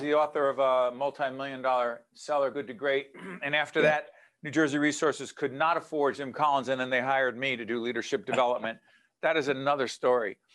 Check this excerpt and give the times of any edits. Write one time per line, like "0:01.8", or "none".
none